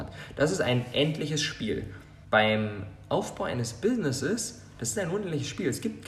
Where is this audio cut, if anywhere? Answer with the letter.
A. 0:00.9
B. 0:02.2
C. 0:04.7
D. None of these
B